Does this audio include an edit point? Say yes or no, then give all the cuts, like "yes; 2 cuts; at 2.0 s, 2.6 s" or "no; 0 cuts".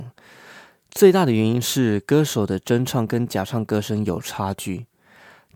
no; 0 cuts